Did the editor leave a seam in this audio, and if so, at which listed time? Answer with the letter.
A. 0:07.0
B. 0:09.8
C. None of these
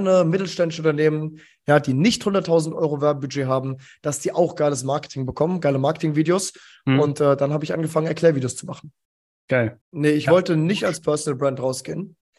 B